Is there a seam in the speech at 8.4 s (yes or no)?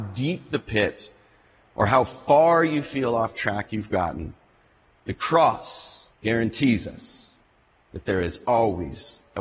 no